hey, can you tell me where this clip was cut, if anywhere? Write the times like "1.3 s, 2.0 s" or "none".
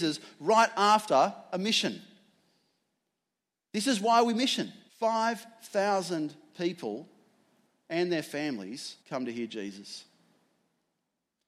4.9 s, 9.0 s